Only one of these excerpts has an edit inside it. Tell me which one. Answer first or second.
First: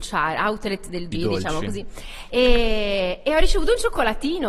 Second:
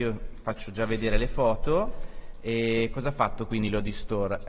first